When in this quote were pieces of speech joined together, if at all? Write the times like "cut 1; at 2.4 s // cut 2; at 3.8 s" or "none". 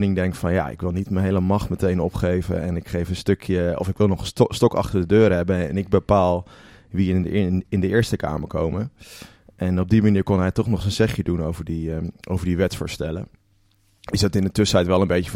none